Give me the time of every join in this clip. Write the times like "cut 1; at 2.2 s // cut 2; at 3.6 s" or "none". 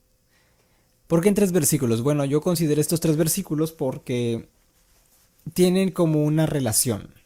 none